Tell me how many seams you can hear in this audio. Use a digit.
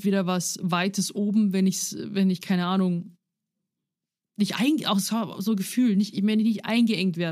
0